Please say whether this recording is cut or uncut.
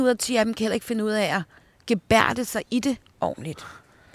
uncut